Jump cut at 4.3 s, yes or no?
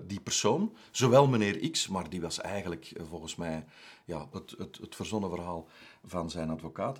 yes